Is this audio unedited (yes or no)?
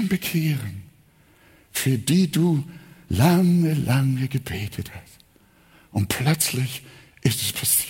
yes